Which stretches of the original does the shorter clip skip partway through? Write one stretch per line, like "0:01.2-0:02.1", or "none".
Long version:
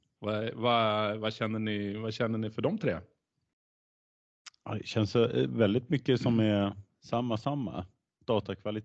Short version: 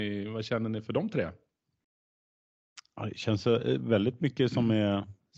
none